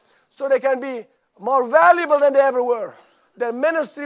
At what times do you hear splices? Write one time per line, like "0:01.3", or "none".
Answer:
0:01.3